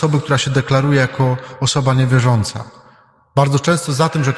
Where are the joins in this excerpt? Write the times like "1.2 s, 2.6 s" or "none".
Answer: none